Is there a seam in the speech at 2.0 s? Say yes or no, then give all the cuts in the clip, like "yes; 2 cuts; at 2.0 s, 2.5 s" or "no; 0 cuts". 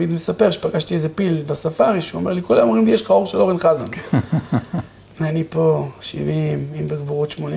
no; 1 cut; at 5.1 s